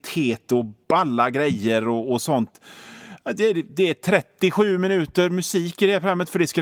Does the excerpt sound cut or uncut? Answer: uncut